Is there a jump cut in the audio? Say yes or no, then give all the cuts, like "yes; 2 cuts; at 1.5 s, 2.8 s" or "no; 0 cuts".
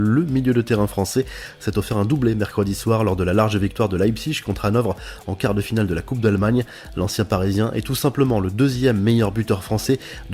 no; 0 cuts